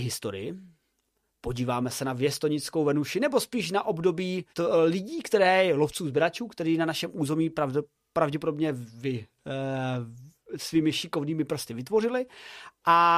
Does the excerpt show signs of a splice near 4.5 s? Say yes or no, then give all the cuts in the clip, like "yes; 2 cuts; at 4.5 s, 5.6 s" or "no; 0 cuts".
yes; 1 cut; at 4.5 s